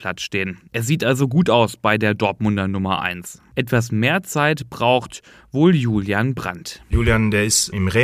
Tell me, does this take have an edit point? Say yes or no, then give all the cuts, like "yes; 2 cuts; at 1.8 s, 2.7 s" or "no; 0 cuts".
no; 0 cuts